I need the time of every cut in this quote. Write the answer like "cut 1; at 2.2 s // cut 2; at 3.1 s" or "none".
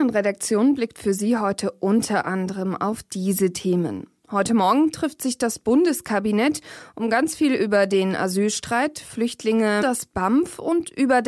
cut 1; at 9.8 s